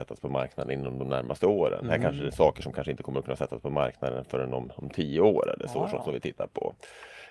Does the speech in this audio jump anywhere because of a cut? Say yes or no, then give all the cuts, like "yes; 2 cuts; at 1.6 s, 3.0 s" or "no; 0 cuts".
yes; 1 cut; at 2.3 s